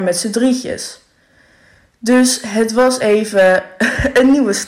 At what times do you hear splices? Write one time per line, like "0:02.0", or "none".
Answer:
none